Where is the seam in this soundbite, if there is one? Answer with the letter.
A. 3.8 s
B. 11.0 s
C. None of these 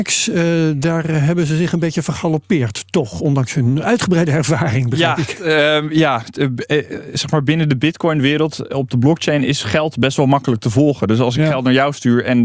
A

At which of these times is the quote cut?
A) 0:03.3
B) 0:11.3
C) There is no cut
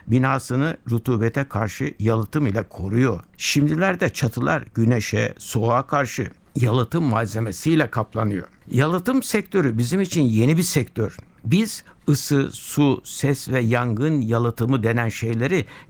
A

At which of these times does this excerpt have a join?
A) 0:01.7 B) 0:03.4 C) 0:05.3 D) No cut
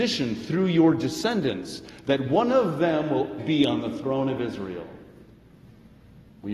B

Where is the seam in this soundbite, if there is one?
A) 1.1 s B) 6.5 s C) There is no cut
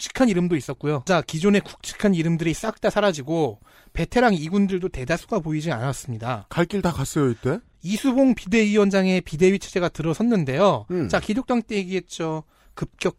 A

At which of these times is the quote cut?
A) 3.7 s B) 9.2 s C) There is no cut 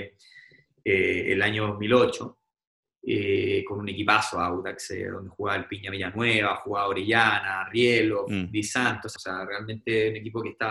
B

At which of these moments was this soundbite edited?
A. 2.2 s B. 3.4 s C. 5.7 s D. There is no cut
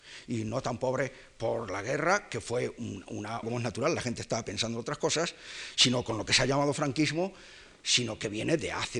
B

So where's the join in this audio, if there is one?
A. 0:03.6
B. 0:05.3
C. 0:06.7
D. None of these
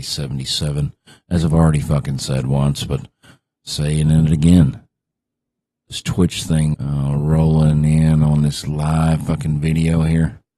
C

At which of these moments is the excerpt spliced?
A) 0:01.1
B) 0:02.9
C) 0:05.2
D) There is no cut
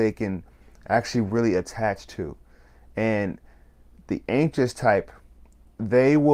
D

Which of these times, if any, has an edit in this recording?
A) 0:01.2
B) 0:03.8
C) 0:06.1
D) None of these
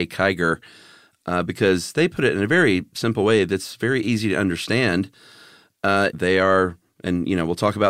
C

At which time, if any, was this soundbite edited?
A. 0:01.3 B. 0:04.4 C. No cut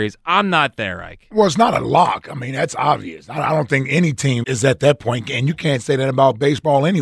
B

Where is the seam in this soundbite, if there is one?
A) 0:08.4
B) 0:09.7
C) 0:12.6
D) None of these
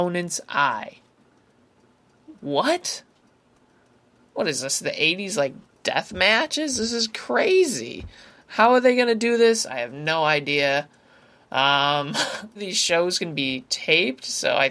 C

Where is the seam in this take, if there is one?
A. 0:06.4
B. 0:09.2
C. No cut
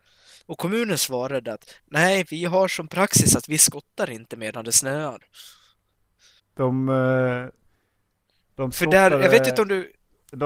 A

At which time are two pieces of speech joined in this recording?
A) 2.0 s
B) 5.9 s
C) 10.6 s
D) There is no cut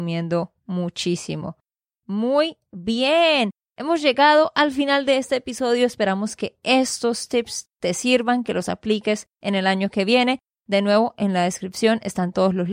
D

